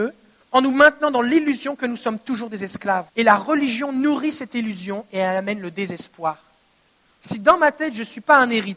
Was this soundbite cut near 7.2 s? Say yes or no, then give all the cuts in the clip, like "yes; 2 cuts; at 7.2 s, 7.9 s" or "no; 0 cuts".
yes; 2 cuts; at 3.1 s, 7.2 s